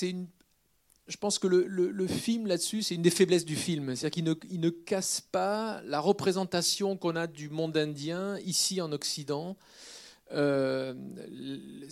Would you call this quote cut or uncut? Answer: uncut